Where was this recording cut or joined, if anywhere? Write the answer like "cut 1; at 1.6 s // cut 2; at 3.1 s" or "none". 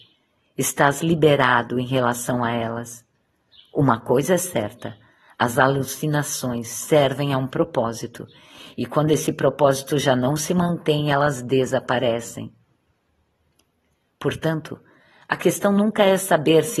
none